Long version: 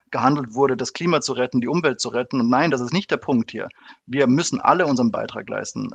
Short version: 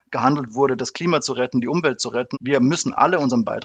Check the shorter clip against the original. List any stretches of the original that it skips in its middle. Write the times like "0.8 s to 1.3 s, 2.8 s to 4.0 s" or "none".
2.3 s to 4.0 s